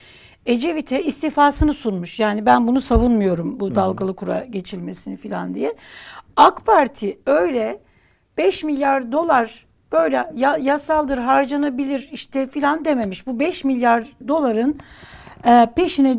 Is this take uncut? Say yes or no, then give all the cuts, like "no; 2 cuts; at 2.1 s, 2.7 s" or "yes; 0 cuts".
yes; 0 cuts